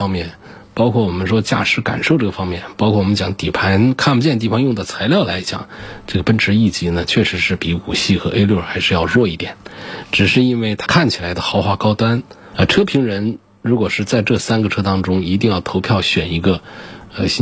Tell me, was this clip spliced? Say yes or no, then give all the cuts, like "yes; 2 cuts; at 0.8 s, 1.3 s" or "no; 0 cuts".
yes; 1 cut; at 12.5 s